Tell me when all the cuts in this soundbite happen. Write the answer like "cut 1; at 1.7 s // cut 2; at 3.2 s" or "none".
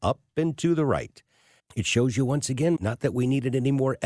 cut 1; at 1.6 s // cut 2; at 2.8 s